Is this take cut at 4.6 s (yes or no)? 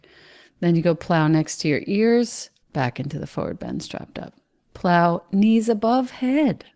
no